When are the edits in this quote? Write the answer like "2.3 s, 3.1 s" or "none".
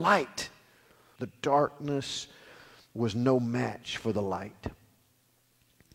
1.2 s